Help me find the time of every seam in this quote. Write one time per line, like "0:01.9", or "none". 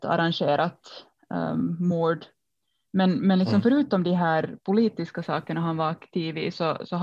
none

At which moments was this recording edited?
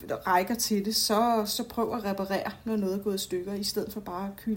none

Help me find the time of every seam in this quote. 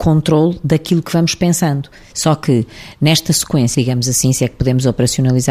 0:02.1
0:03.7

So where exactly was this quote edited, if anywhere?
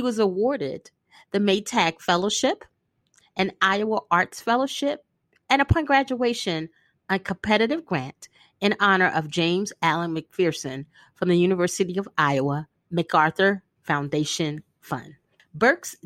none

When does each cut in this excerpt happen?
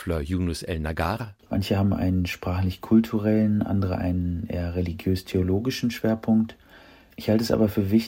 none

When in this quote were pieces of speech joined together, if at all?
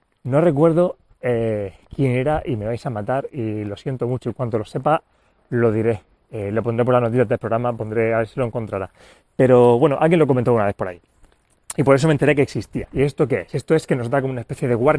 0:12.9

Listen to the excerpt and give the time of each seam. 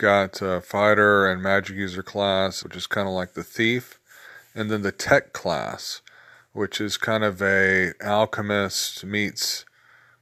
0:02.6

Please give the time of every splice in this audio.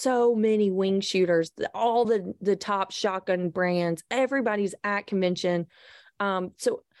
none

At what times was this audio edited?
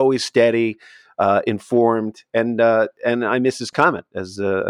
none

